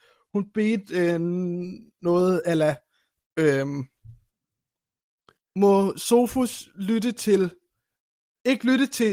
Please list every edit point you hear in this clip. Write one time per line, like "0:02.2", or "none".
none